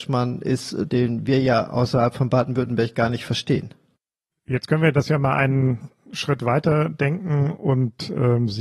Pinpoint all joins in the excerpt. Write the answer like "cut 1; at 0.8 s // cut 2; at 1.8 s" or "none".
none